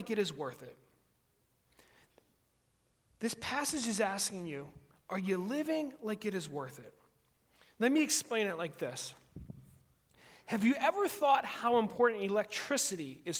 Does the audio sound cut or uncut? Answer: uncut